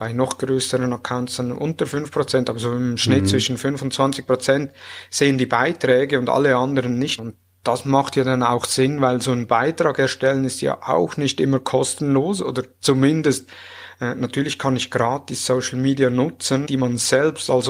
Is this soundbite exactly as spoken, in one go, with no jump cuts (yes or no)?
no